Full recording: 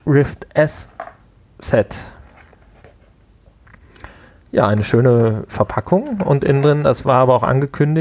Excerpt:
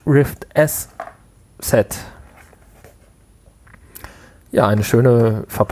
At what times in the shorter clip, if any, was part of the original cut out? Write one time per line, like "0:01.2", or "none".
none